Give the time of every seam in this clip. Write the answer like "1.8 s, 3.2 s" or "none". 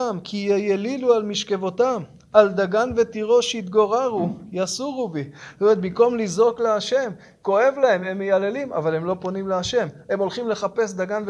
none